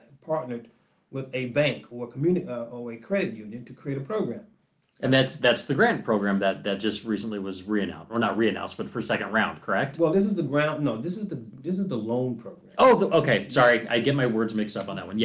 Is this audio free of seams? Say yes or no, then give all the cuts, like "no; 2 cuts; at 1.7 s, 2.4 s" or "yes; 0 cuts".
yes; 0 cuts